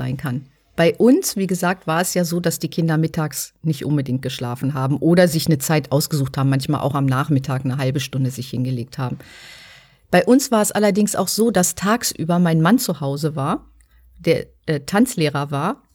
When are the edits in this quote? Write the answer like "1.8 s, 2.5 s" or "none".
none